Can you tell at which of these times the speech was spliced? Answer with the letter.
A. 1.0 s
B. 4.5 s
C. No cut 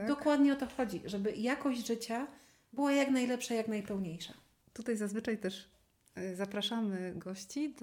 C